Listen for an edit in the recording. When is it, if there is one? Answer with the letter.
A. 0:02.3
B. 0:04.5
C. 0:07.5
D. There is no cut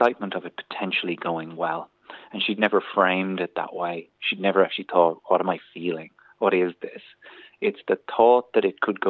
D